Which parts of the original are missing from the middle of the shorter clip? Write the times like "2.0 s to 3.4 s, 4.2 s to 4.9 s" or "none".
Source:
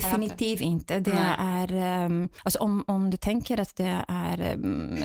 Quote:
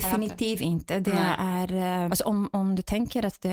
2.1 s to 2.4 s